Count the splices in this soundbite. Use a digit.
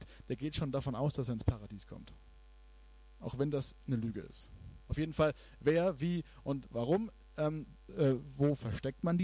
2